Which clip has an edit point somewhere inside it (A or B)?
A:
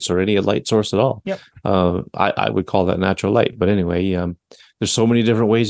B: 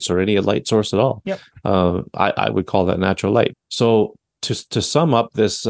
B